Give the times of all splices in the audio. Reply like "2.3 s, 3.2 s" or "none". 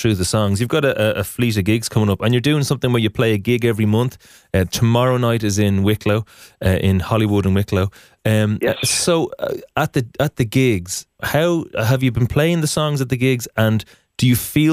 none